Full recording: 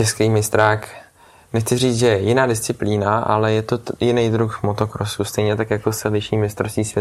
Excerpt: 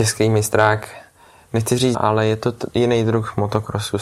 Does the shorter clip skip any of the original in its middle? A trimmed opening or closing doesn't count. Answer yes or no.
yes